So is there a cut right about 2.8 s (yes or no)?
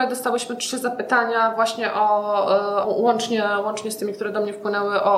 yes